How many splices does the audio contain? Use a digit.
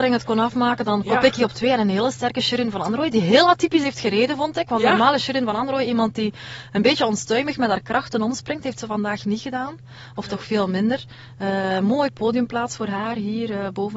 0